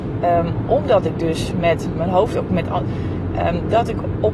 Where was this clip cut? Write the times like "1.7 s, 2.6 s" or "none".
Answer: 2.8 s